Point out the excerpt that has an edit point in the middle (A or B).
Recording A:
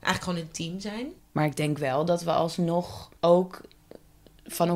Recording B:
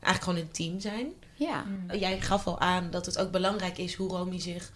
A